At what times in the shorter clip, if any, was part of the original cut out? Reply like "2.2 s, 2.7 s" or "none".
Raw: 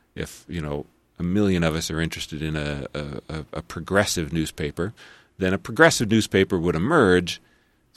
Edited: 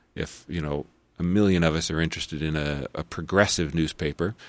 2.9 s